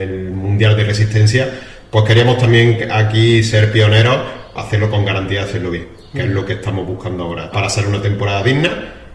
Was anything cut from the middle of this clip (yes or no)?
yes